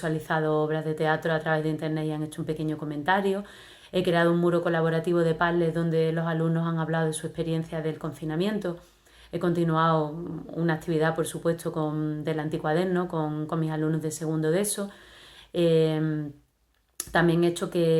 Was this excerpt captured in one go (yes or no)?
yes